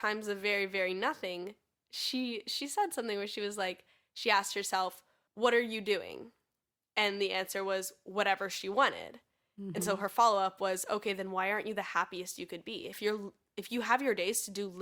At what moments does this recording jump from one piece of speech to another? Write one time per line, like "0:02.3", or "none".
none